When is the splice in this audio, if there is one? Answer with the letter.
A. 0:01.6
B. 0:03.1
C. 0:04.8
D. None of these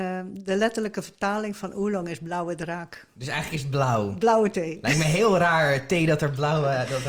D